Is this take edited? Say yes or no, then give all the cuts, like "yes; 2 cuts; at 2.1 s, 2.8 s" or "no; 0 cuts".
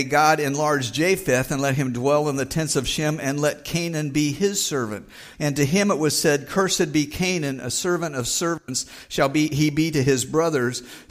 yes; 1 cut; at 5.3 s